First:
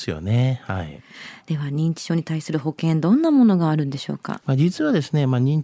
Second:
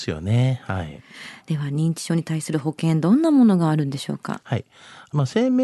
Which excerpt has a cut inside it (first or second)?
first